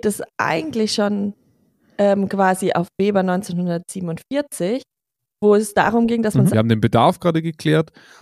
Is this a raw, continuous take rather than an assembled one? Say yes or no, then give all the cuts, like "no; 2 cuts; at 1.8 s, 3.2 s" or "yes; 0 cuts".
no; 1 cut; at 6.5 s